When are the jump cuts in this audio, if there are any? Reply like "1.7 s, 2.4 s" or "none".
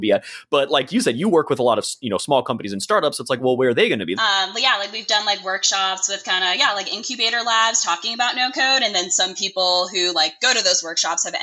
4.2 s

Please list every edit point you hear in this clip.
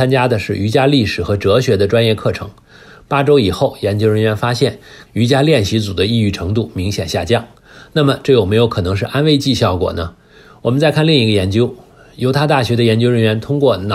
5.1 s

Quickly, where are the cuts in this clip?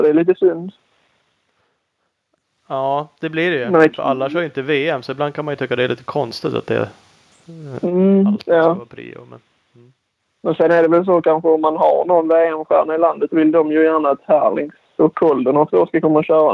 13.3 s

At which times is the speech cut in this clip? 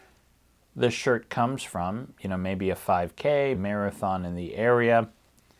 3.5 s

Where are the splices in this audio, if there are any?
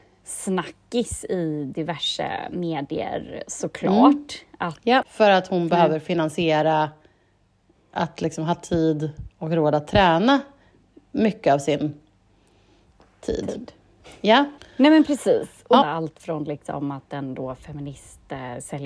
5.0 s, 14.6 s, 15.8 s

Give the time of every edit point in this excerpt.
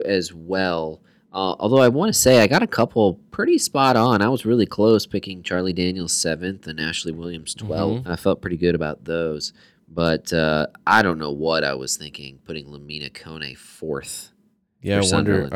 8.1 s

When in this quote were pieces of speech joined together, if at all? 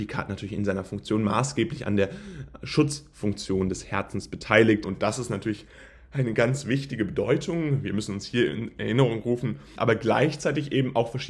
4.8 s, 9.8 s

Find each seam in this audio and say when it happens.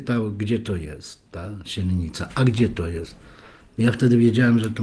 none

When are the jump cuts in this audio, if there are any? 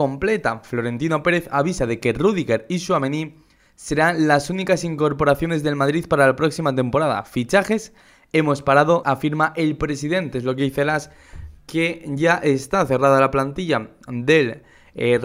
9.0 s

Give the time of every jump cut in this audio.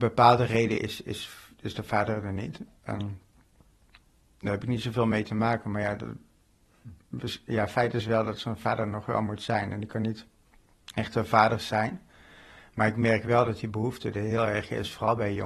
none

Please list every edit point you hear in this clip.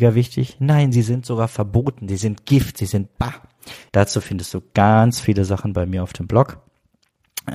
3.9 s

